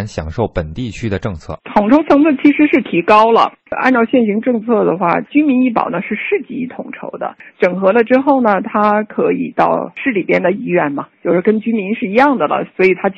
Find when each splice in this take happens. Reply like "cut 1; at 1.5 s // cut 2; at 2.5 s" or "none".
cut 1; at 5.3 s